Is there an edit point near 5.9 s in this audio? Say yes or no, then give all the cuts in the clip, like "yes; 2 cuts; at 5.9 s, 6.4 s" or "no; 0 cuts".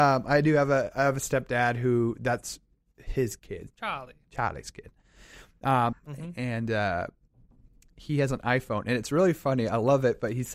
yes; 1 cut; at 5.9 s